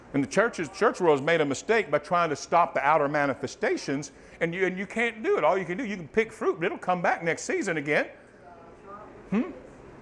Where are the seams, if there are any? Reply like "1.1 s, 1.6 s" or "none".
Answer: none